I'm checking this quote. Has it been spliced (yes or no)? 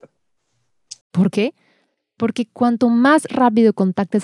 yes